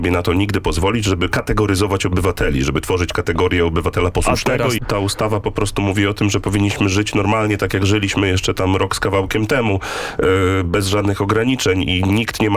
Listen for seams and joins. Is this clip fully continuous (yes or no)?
no